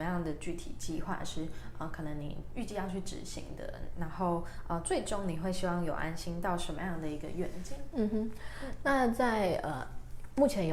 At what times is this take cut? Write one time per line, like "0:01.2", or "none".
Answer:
none